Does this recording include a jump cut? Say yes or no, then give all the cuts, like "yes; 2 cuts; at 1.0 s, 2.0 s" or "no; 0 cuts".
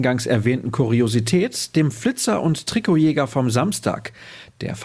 no; 0 cuts